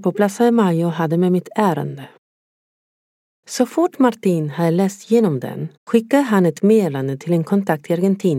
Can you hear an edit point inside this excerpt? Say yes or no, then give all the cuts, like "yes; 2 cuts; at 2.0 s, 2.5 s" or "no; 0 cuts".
yes; 1 cut; at 5.8 s